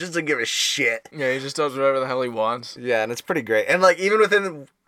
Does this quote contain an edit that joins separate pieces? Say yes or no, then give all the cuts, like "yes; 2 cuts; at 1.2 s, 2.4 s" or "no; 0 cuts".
no; 0 cuts